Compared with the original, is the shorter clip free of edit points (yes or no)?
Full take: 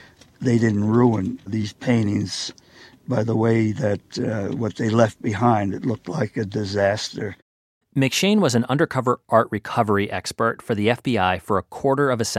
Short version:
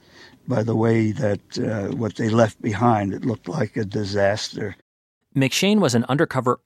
yes